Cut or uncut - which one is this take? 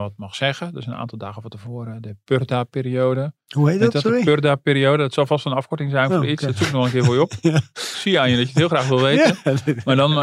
uncut